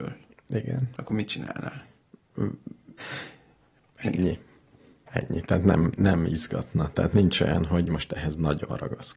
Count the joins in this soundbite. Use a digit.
1